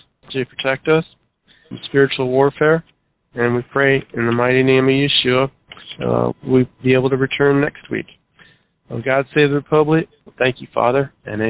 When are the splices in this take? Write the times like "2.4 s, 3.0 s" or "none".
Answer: 6.3 s, 10.3 s

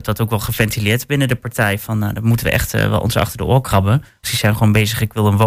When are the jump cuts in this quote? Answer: 4.2 s

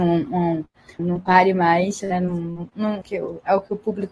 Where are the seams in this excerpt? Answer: 1.0 s, 2.0 s, 3.0 s

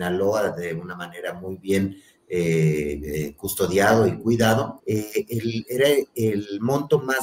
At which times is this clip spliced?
4.8 s

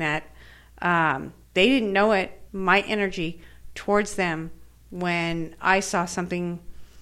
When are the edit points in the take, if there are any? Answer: 1.4 s, 2.5 s

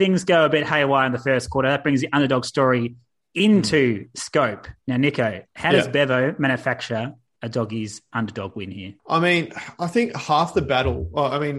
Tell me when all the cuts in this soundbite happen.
5.5 s

